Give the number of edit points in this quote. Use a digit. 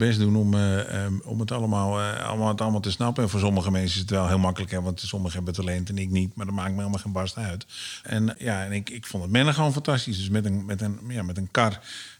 1